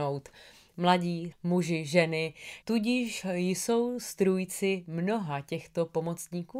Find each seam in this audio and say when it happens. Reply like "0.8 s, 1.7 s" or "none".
1.3 s, 2.6 s